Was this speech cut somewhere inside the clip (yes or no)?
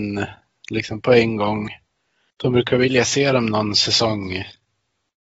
yes